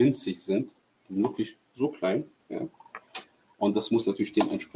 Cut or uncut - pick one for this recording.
uncut